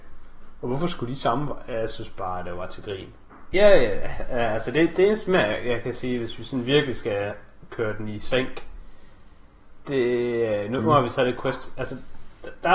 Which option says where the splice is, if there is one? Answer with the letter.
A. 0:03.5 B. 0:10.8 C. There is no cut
A